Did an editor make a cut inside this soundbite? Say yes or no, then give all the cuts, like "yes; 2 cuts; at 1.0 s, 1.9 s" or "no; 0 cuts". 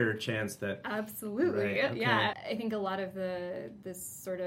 yes; 1 cut; at 2.3 s